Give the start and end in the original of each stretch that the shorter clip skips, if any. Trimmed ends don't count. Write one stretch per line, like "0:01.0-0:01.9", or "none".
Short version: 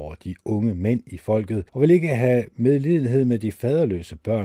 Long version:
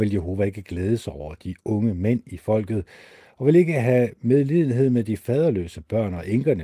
0:02.9-0:03.3